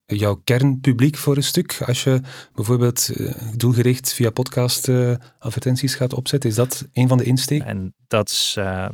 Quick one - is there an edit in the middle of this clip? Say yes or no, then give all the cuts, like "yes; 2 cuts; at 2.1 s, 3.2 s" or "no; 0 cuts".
yes; 1 cut; at 7.6 s